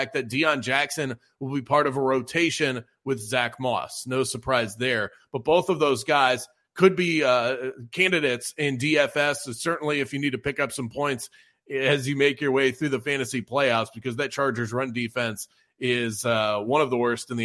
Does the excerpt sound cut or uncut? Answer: uncut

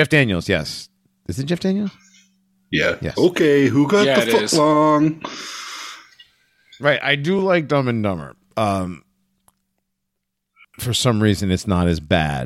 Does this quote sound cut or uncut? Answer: uncut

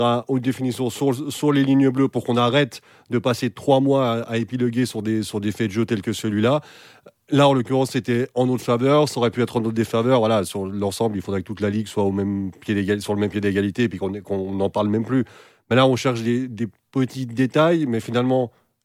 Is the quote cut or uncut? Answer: uncut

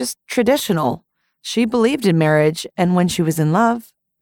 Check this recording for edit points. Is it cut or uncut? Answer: uncut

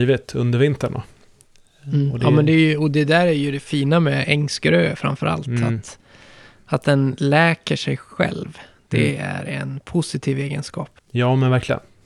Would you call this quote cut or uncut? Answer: uncut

